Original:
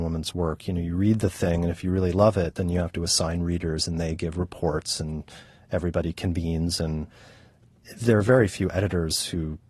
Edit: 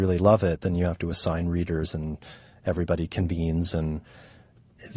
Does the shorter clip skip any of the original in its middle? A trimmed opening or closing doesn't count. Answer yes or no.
yes